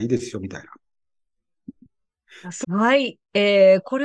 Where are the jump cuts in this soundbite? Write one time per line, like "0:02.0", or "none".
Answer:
0:02.6